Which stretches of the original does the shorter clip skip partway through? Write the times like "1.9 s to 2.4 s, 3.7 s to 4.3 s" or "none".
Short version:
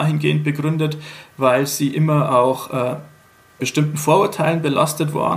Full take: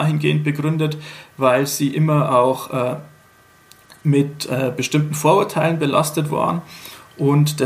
3.6 s to 4.8 s